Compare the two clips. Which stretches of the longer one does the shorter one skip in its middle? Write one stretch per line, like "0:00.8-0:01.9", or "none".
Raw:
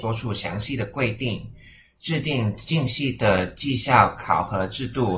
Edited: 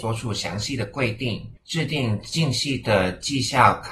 0:01.6-0:01.9